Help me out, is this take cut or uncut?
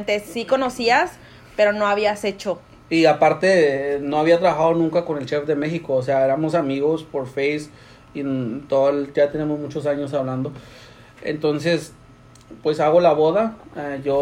uncut